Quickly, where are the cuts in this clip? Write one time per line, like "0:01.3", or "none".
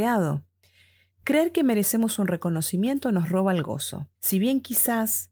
0:01.1
0:04.2